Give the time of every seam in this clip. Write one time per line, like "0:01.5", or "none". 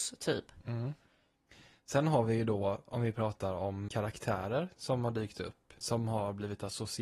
0:03.9
0:05.8